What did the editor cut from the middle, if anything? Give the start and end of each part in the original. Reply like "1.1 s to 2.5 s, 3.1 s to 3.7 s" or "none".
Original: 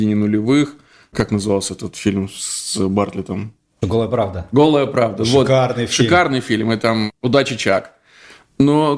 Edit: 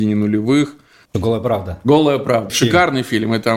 1.1 s to 3.7 s, 5.2 s to 5.9 s